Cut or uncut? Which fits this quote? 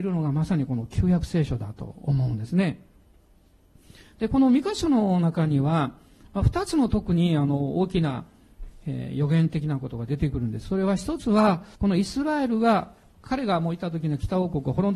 cut